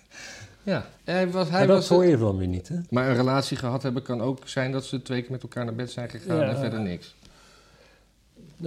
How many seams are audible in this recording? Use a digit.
2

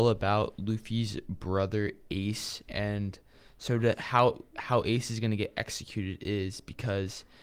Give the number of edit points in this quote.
1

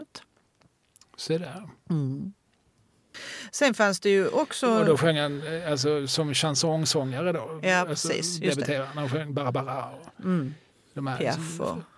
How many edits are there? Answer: 0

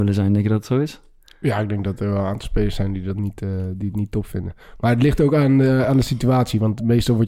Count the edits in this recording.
0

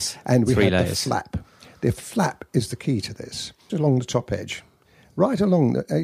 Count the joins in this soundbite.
1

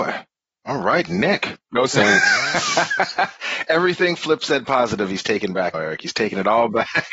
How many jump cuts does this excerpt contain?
2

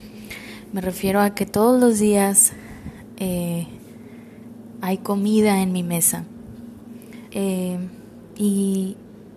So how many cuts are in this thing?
1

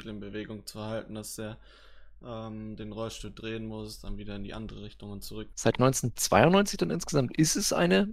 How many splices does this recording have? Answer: 1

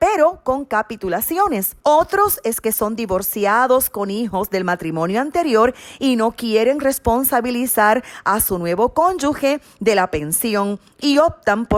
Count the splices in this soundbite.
1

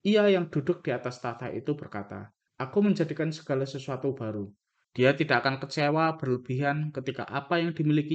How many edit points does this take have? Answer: 2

